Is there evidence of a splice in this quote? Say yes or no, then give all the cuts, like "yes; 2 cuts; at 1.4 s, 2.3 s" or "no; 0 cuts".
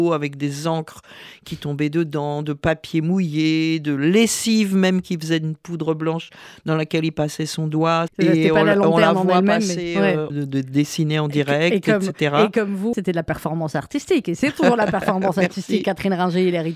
yes; 3 cuts; at 8.1 s, 10.3 s, 12.9 s